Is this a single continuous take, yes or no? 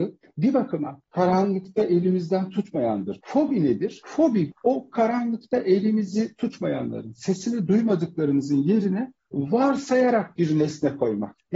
yes